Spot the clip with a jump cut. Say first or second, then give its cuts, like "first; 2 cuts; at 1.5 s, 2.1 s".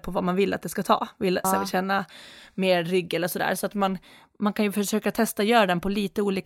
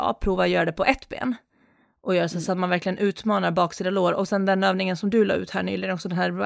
first; 1 cut; at 1.4 s